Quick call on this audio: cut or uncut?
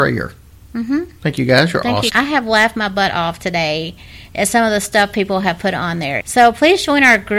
cut